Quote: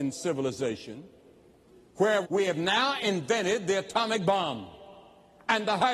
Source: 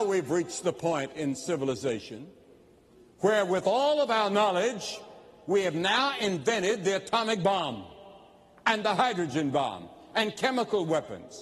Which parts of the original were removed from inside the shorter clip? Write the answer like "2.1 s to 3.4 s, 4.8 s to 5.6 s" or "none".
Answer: 3.5 s to 5.4 s